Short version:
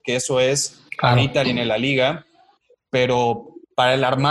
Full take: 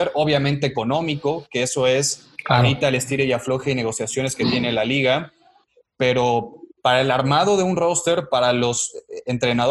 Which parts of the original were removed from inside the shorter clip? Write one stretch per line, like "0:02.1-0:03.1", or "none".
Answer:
0:02.9-0:04.5